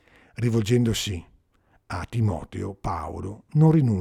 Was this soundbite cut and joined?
no; 0 cuts

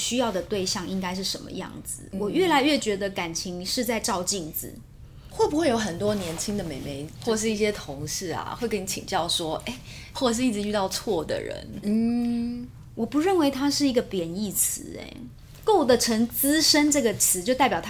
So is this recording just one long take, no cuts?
no; 3 cuts; at 5.3 s, 10.1 s, 11.8 s

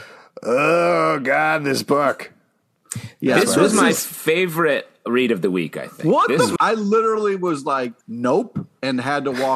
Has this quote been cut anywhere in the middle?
yes; 2 cuts; at 6.6 s, 8.0 s

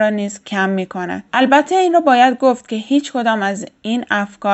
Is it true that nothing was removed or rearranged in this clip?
no; 1 cut; at 1.3 s

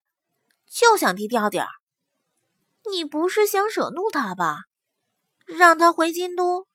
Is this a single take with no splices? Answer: yes; 0 cuts

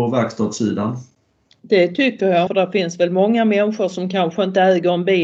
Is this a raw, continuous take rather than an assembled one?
no; 1 cut; at 2.5 s

